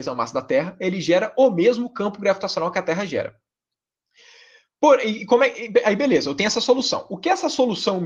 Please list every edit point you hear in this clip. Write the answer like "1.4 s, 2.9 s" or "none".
none